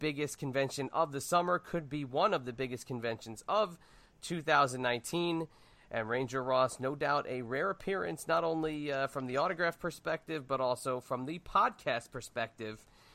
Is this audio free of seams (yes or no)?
yes